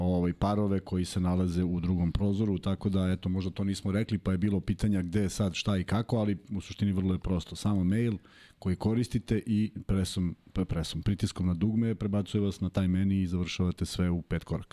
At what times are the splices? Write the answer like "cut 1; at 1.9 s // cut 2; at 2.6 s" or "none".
none